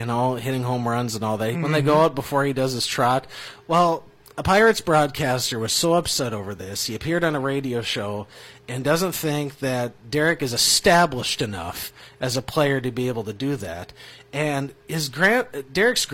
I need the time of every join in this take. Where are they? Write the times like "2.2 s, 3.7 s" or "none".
1.5 s